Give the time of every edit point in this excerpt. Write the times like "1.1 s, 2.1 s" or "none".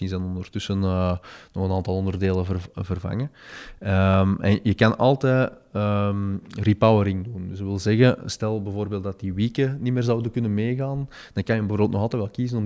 none